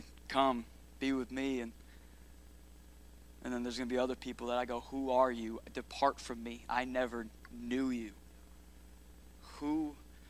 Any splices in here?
no; 0 cuts

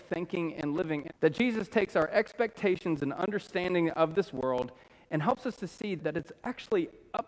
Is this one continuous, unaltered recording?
no; 2 cuts; at 1.1 s, 6.0 s

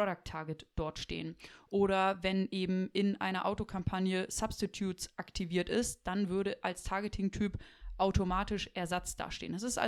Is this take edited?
no; 0 cuts

